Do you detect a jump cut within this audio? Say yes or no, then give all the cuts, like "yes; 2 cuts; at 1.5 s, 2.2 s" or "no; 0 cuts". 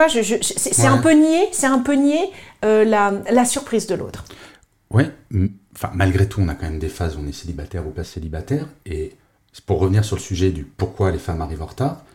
no; 0 cuts